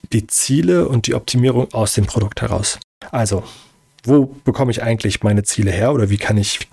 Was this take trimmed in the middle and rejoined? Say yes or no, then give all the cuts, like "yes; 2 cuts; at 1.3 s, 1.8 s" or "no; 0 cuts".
no; 0 cuts